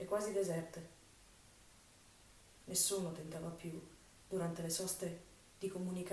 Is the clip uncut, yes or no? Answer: yes